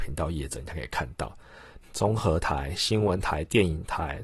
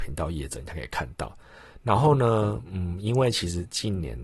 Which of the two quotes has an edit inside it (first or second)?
first